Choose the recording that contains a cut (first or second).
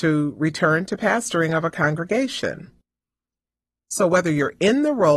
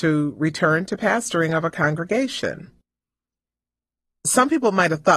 first